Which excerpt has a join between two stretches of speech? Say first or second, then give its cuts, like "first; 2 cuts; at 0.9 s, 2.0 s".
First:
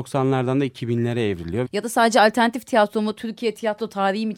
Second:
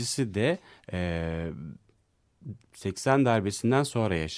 first; 1 cut; at 1.6 s